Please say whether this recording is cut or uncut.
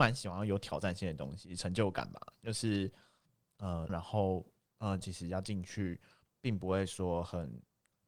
cut